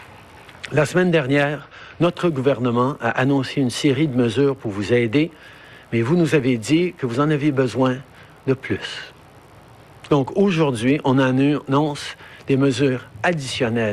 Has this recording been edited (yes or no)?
yes